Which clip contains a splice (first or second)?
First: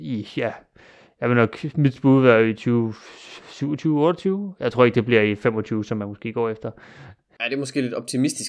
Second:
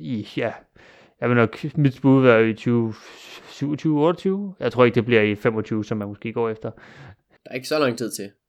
second